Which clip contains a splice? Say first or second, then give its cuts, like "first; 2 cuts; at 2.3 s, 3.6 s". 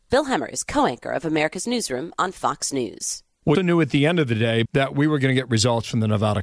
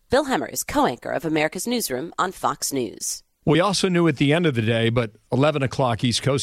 first; 2 cuts; at 3.5 s, 4.6 s